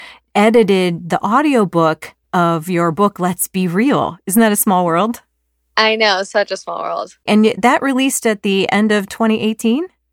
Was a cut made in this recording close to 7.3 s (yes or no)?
yes